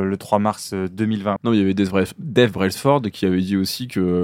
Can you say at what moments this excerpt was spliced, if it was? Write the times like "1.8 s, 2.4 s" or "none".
1.4 s

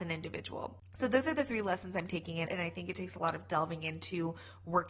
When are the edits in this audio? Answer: 2.5 s

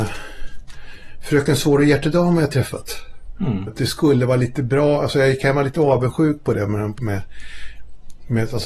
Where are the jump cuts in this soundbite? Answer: 3.7 s, 7.0 s

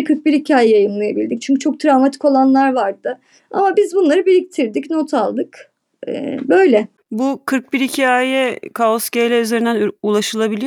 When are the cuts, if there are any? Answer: 3.4 s

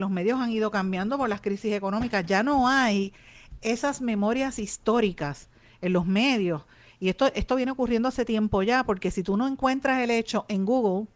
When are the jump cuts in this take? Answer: none

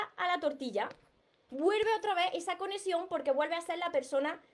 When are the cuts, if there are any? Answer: none

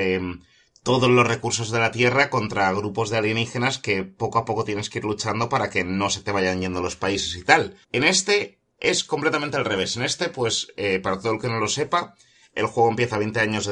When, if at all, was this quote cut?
7.8 s

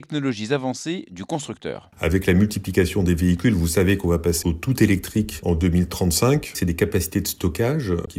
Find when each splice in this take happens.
4.4 s

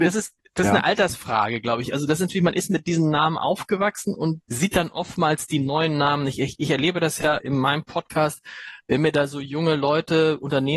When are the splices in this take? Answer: 4.4 s, 7.4 s

